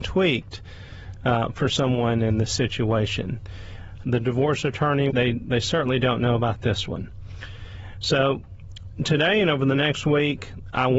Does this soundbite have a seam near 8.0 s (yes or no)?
no